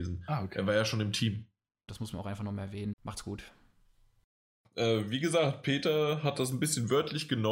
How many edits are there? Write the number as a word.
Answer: two